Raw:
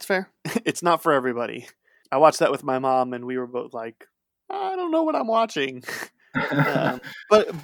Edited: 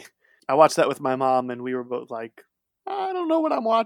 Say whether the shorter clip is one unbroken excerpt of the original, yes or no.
yes